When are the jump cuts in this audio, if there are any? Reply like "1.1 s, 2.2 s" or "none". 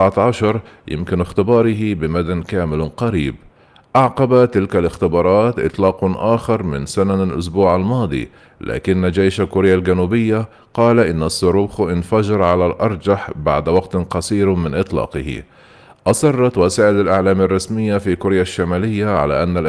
none

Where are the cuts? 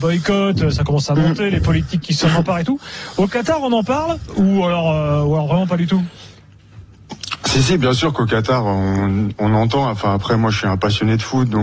none

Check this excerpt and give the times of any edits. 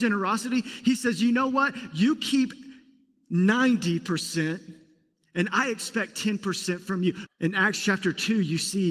7.3 s

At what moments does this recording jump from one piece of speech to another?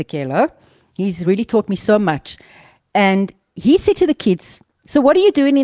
none

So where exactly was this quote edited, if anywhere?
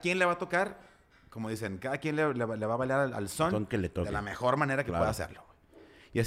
none

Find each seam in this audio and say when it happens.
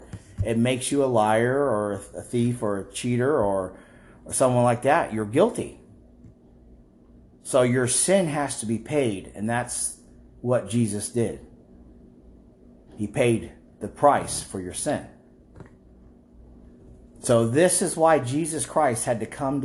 none

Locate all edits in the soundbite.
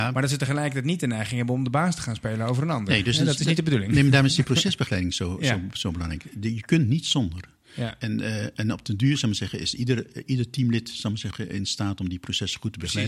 none

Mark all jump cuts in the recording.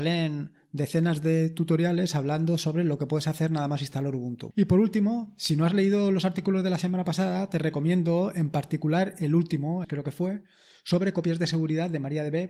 4.5 s, 9.8 s

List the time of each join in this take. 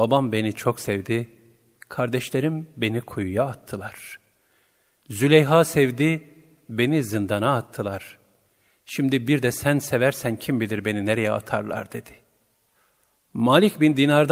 none

